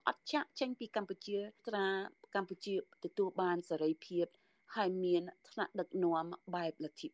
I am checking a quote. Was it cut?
no; 0 cuts

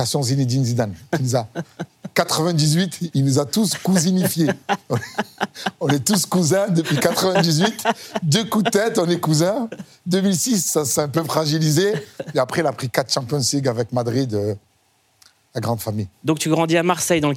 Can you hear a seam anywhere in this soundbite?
no; 0 cuts

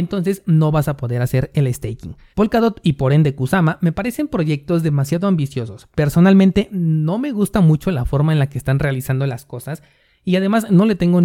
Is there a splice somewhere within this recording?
yes; 1 cut; at 2.3 s

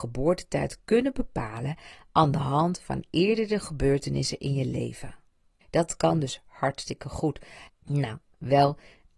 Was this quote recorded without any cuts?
no; 2 cuts; at 5.6 s, 7.7 s

